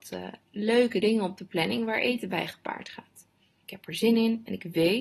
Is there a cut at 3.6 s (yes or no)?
yes